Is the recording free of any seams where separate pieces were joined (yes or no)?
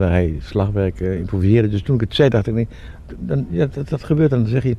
yes